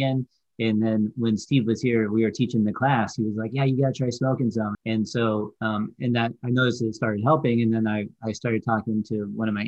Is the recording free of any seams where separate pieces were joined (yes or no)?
no